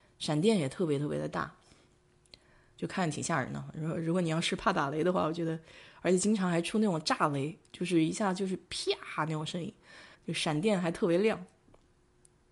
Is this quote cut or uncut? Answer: cut